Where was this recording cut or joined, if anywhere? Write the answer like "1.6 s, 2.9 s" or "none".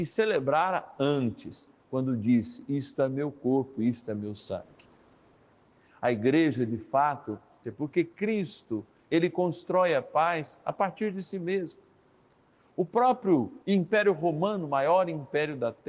7.6 s, 13.6 s